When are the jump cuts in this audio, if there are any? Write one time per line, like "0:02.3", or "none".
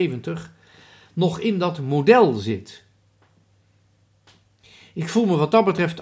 none